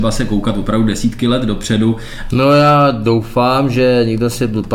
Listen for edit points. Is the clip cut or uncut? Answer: cut